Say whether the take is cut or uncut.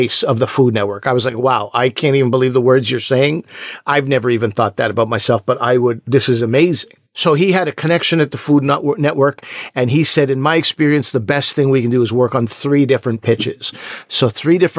uncut